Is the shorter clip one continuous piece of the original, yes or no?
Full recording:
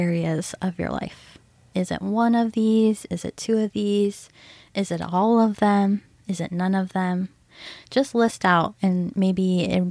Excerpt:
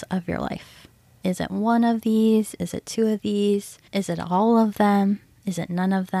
no